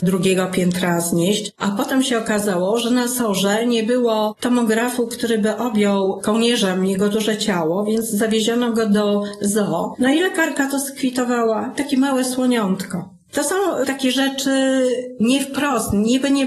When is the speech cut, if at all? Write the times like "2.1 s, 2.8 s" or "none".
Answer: 13.8 s